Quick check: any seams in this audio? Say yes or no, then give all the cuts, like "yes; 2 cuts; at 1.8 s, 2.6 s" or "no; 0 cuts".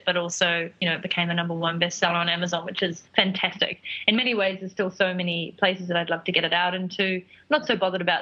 no; 0 cuts